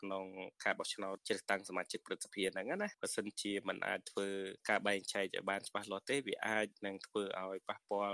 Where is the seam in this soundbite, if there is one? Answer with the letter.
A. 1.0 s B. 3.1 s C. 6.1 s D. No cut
D